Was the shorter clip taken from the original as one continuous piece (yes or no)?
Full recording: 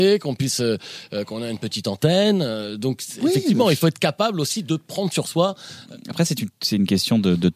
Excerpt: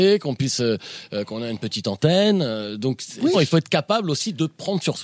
no